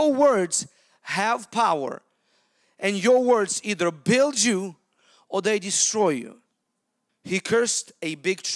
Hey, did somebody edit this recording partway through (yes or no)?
yes